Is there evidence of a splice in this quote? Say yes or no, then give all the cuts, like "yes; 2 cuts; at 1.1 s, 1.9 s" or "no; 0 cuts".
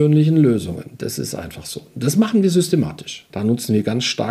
yes; 1 cut; at 3.3 s